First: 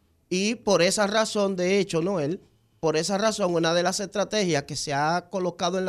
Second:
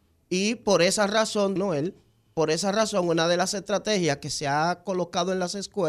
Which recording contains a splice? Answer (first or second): second